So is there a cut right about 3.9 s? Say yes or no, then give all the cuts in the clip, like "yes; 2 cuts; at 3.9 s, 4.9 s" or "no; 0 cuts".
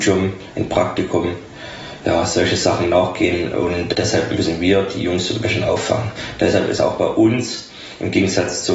yes; 1 cut; at 3.9 s